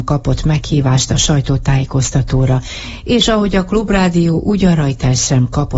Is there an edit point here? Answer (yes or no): no